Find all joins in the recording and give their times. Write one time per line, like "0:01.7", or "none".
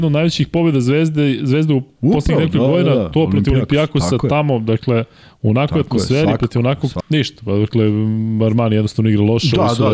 0:07.0